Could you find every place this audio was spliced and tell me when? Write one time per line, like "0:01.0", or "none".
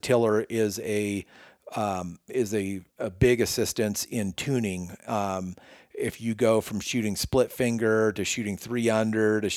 0:02.9